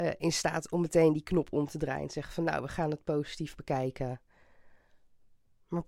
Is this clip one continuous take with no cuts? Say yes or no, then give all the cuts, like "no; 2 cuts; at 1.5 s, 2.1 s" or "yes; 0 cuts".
yes; 0 cuts